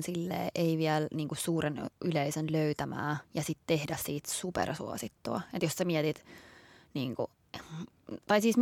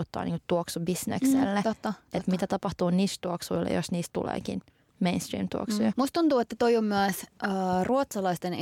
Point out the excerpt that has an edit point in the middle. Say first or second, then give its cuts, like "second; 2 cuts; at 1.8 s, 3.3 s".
second; 1 cut; at 5.9 s